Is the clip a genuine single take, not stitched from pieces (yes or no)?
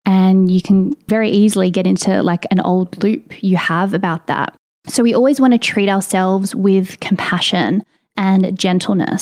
yes